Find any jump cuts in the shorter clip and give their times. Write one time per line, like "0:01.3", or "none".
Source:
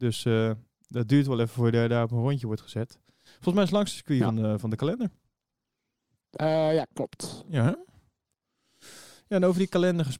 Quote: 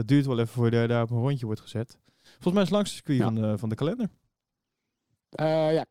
none

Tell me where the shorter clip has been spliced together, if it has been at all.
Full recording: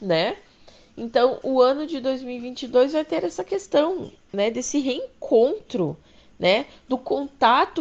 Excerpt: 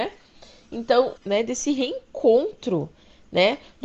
0:01.2

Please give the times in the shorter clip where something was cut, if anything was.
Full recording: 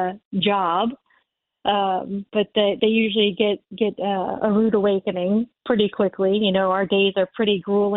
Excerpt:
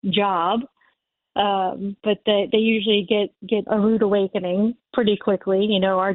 0:03.7

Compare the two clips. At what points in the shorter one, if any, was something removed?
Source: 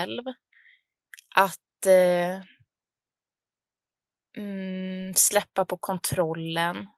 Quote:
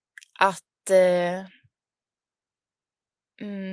none

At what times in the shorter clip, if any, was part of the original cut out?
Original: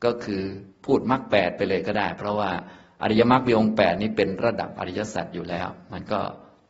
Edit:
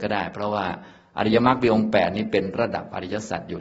none

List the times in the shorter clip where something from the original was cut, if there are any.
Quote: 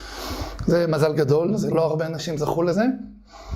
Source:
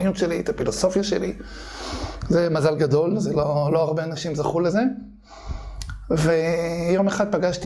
0:01.7

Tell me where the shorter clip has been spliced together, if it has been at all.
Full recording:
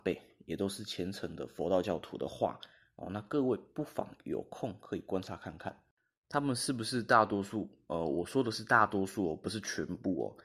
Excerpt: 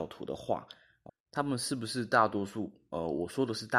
0:01.1

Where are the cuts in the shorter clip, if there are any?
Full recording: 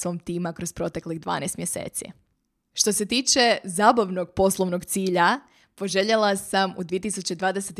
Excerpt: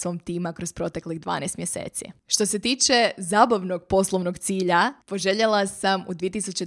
0:02.2
0:05.0

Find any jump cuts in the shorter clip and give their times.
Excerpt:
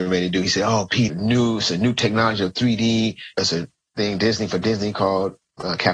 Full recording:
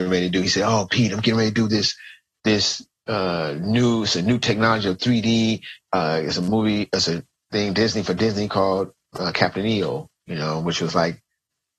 0:01.1
0:03.3

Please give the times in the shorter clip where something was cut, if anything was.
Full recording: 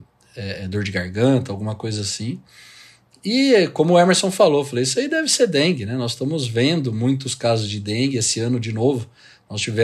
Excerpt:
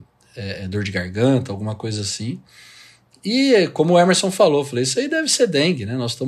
none

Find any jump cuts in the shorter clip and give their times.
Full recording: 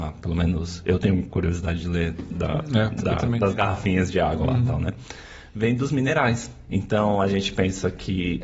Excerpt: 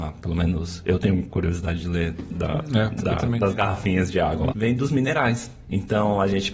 0:04.5

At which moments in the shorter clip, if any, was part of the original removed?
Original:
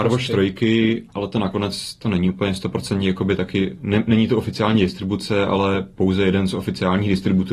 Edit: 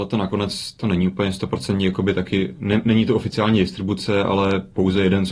none

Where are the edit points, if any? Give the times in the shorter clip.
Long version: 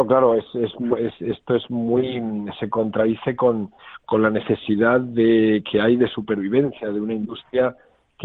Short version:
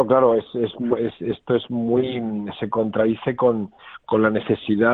none

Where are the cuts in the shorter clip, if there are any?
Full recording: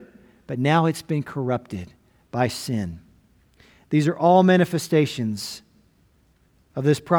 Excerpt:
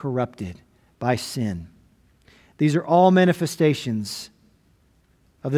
none

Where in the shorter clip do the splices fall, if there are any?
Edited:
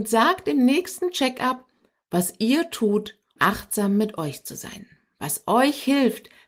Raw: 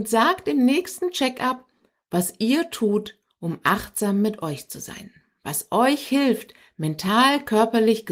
0:03.4

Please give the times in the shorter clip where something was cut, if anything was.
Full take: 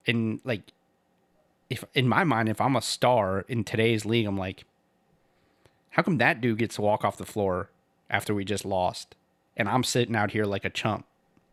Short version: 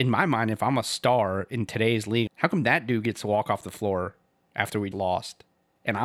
0:02.3
0:04.9

